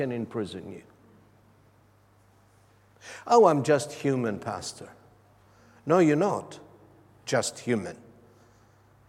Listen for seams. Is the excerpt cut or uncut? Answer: uncut